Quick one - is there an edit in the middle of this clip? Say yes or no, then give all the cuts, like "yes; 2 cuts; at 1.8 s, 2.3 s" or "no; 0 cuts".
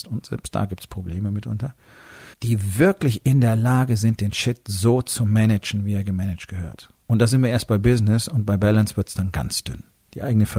yes; 1 cut; at 2.3 s